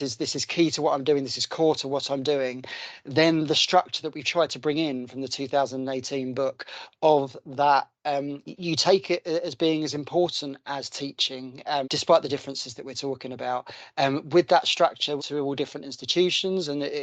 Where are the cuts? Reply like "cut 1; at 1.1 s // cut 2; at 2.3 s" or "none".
cut 1; at 8.4 s // cut 2; at 11.8 s // cut 3; at 15.2 s